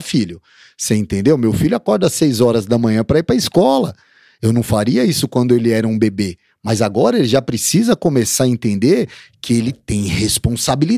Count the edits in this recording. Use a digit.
0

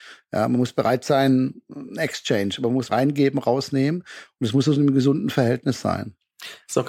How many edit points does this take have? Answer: 1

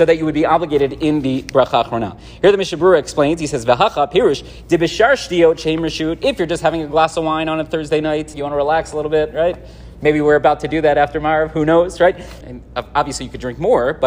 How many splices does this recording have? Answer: 2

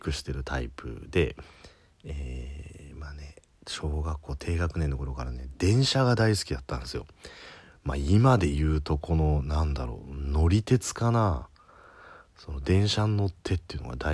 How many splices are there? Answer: 0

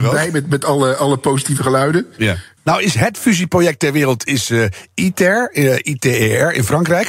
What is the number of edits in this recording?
1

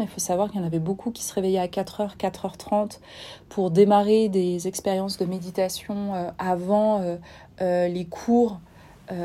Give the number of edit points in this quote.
0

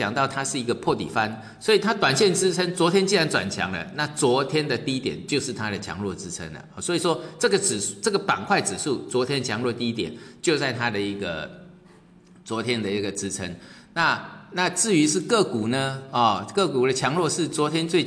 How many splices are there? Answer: 0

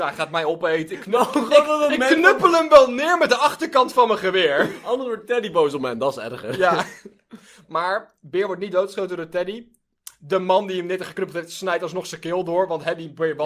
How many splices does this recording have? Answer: 0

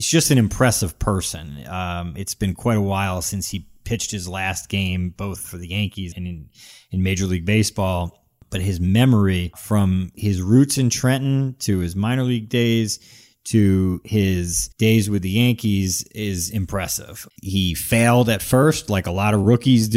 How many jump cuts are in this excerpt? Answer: 3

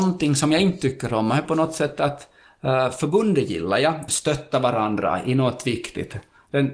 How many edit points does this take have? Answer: 1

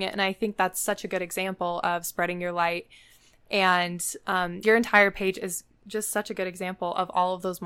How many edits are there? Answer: 1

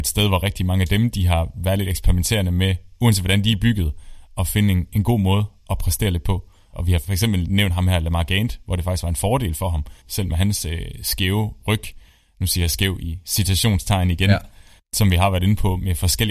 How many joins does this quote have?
2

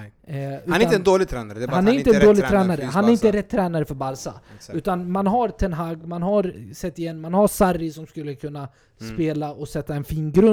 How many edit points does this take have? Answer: 0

